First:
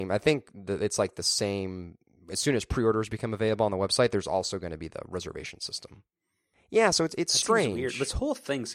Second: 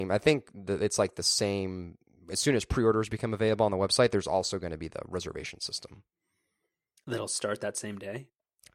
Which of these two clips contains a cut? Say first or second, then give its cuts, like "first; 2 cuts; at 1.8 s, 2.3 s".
first; 1 cut; at 6.5 s